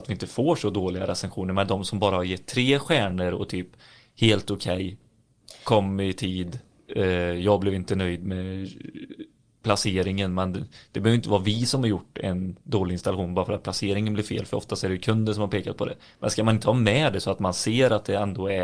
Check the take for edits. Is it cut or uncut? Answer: uncut